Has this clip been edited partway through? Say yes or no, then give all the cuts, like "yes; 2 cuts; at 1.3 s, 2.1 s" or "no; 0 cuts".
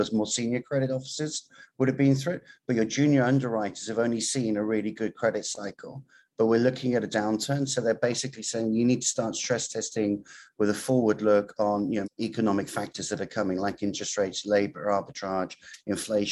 yes; 1 cut; at 12.0 s